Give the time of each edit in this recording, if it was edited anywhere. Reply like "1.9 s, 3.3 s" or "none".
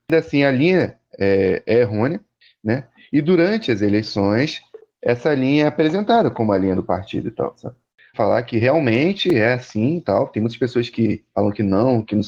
8.1 s